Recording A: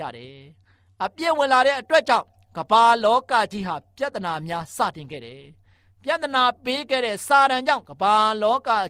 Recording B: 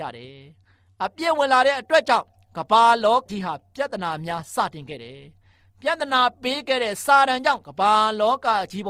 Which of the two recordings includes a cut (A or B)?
B